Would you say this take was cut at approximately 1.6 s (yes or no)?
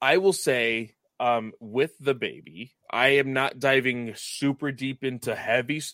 no